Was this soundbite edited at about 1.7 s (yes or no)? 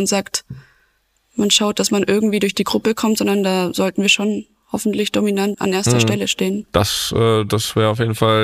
no